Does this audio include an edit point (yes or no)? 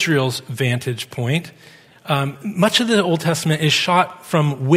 no